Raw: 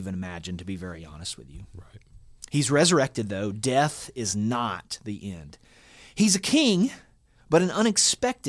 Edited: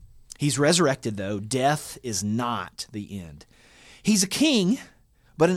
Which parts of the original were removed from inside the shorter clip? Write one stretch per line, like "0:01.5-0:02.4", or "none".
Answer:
none